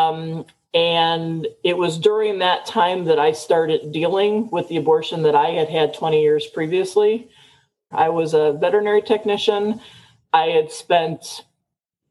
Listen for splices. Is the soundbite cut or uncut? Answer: cut